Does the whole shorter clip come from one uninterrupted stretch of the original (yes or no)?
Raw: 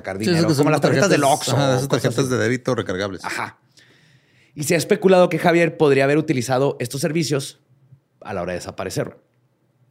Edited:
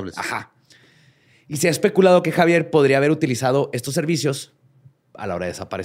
yes